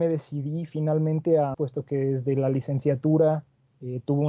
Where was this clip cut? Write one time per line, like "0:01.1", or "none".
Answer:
0:01.5